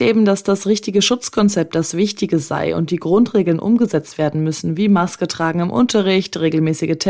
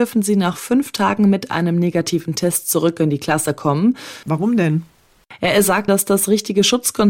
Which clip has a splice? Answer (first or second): second